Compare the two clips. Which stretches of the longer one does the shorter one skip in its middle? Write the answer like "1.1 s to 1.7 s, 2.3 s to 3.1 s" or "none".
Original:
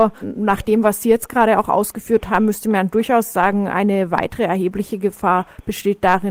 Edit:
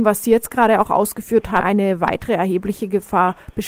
2.4 s to 3.7 s

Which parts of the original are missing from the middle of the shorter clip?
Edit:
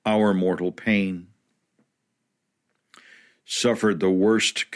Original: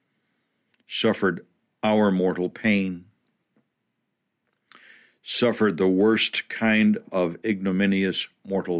none

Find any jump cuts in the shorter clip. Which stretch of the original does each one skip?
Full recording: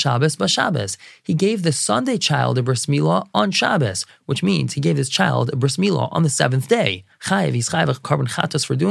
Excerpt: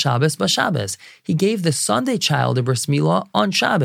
none

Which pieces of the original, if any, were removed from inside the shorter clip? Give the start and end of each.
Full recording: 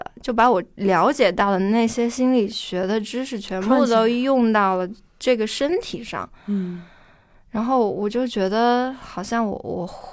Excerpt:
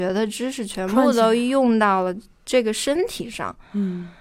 none

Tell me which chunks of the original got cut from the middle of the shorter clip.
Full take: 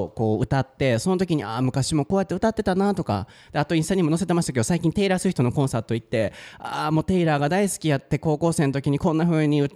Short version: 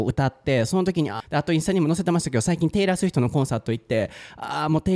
1.5 s to 3.4 s

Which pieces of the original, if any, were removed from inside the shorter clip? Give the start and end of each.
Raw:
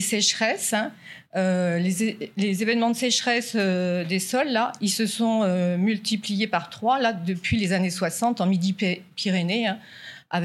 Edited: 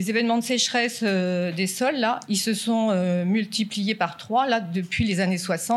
none

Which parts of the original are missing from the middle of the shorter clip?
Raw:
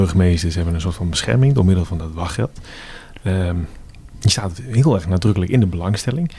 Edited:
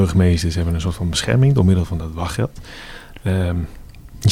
none

